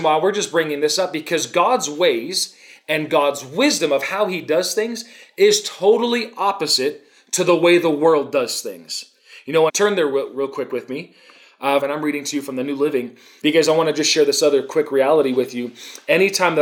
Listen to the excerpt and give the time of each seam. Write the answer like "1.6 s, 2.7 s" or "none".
9.7 s, 11.8 s, 13.4 s